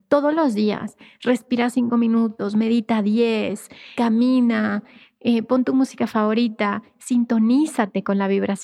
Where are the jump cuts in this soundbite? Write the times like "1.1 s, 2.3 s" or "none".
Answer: 3.9 s